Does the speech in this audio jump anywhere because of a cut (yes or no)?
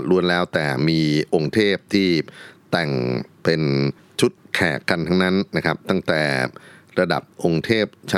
no